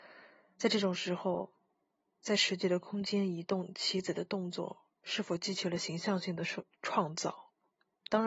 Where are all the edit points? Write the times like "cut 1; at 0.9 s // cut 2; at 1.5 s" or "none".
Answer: none